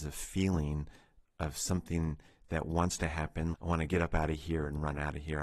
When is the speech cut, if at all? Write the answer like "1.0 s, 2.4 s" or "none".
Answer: 3.5 s